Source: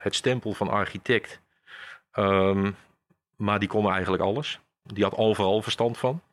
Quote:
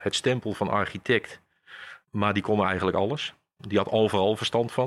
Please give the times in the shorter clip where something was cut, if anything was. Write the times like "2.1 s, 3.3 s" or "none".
2.0 s